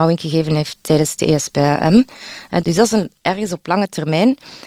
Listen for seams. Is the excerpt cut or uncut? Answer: cut